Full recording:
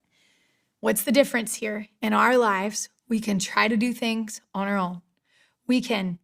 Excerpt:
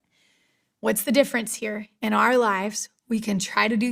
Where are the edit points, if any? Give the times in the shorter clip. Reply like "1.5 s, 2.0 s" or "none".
none